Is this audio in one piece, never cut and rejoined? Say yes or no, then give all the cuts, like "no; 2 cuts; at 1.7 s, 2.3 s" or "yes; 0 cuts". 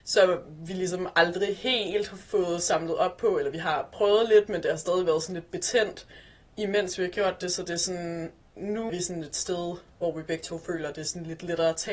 no; 1 cut; at 8.9 s